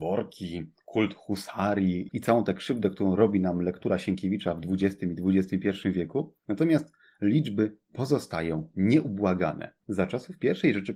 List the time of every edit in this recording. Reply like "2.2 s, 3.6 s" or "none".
2.1 s